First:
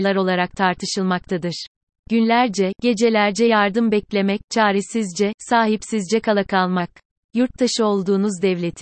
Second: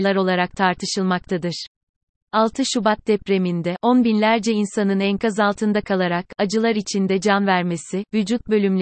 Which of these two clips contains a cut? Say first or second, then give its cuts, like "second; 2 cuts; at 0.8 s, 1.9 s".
first; 1 cut; at 1.9 s